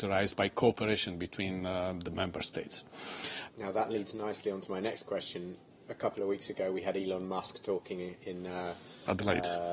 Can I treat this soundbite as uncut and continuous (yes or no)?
no